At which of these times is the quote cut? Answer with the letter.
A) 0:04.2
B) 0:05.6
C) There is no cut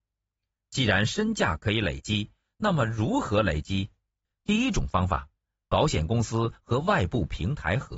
A